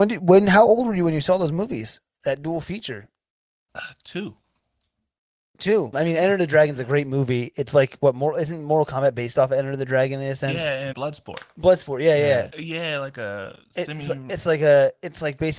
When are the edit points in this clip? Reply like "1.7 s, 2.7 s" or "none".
5.9 s, 10.9 s, 12.5 s

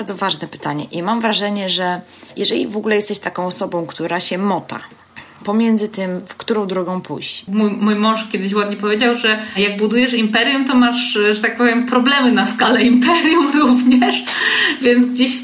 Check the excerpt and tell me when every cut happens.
7.5 s

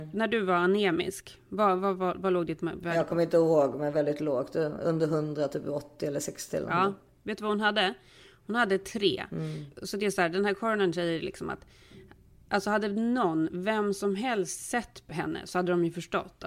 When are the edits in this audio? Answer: none

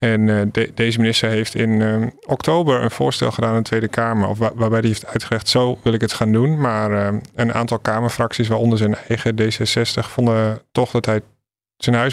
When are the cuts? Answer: none

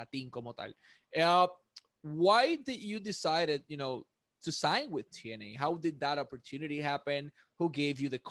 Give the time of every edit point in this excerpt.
none

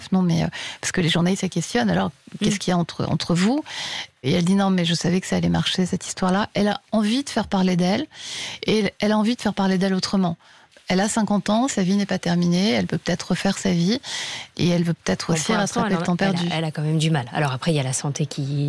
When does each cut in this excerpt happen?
none

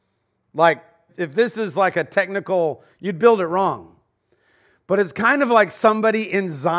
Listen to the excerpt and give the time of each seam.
1.1 s, 2.9 s

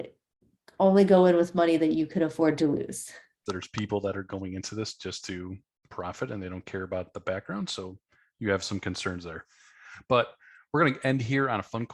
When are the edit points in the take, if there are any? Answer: 3.5 s

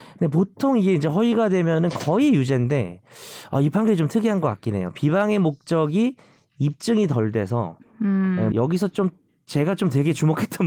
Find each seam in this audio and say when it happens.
8.5 s

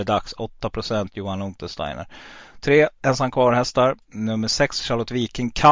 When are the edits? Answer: none

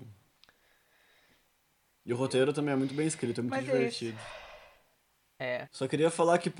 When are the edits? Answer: 5.7 s

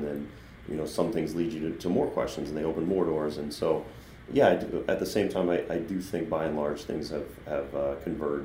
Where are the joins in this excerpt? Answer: none

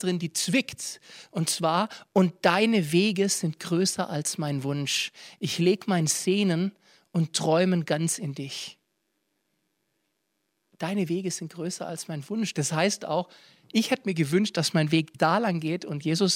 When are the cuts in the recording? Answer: none

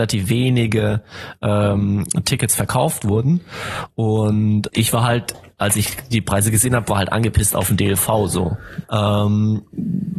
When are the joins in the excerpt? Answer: 4.7 s, 8.8 s

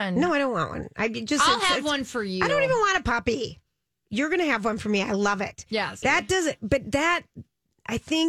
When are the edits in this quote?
6.0 s

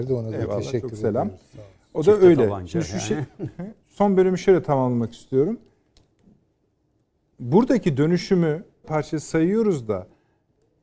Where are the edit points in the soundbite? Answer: 8.8 s

